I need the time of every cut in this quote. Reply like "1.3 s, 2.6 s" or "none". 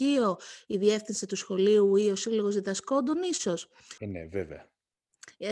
4.0 s